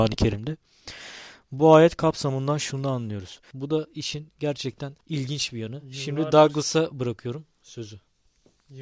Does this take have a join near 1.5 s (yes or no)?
no